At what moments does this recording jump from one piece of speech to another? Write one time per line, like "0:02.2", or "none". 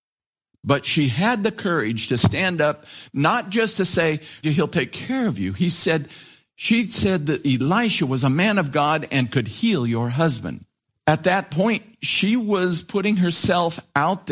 0:04.4
0:10.9